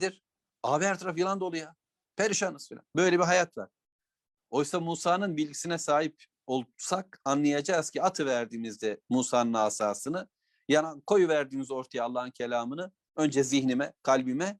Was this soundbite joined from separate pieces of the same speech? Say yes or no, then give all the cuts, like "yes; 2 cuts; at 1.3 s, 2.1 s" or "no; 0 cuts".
no; 0 cuts